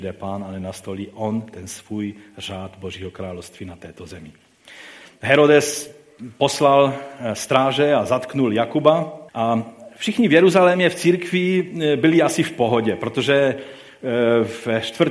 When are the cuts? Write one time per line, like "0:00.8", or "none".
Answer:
0:05.1
0:09.3

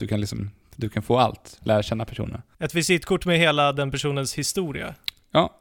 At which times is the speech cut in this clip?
none

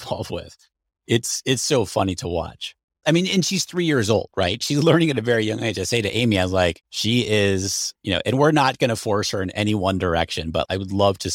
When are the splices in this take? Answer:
none

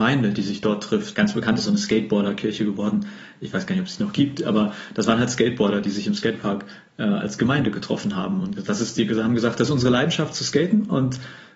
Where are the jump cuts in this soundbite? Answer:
0:01.1

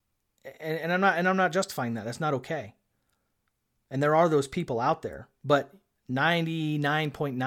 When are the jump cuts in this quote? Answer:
none

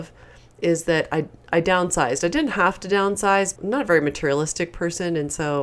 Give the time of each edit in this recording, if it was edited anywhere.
0:03.6

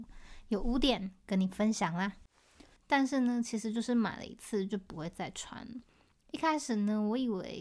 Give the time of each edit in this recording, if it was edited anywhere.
0:02.8

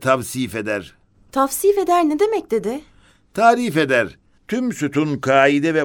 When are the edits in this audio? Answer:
0:04.4

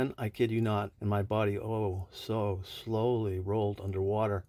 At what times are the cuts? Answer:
0:00.9

